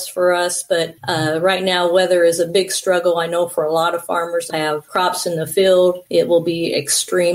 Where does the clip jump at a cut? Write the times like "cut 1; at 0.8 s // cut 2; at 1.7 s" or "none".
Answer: cut 1; at 4.5 s